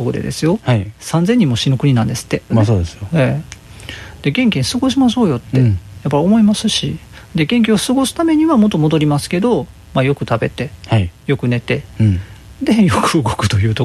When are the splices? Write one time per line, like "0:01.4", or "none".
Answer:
0:02.5